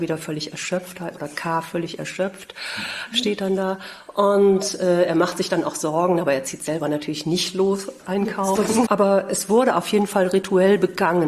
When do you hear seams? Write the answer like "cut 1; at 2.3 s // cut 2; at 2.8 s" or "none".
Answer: cut 1; at 8.9 s